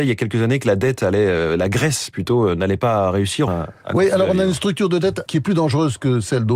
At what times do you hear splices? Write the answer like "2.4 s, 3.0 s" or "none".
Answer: 3.5 s, 5.3 s